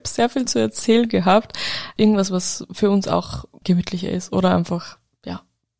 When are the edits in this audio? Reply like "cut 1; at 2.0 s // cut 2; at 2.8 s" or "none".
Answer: cut 1; at 2.0 s // cut 2; at 3.6 s